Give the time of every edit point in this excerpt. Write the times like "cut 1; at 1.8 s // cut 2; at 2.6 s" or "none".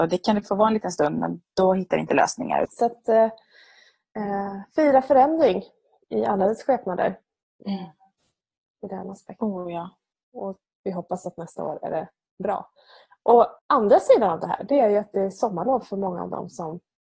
cut 1; at 2.6 s // cut 2; at 10.1 s // cut 3; at 13.6 s